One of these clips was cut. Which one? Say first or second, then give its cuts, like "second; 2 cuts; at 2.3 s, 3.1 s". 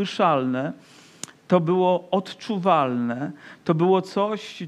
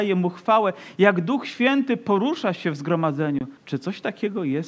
second; 1 cut; at 3.6 s